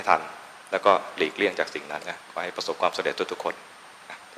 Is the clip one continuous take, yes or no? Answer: no